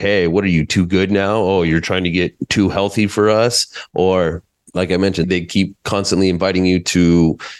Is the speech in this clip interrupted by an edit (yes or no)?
yes